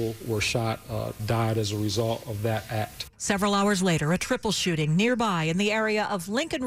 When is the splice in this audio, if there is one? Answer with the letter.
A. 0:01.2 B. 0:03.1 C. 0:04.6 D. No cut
A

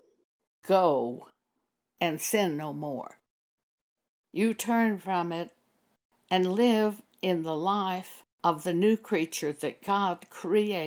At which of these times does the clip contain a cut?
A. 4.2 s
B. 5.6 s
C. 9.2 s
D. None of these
A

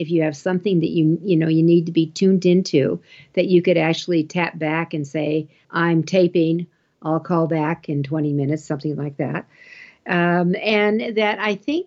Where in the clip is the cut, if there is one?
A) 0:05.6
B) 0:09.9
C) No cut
A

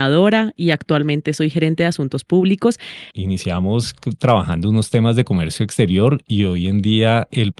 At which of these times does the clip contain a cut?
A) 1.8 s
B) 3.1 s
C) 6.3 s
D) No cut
B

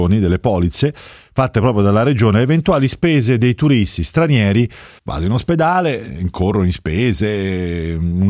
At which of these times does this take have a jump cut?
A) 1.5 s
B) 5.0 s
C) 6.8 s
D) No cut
B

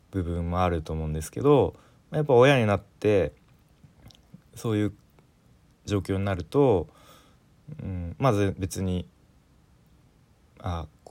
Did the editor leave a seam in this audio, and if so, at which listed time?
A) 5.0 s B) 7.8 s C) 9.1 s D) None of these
D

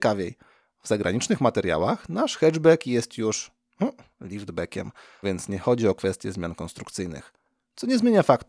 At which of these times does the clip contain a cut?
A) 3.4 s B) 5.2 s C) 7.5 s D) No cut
B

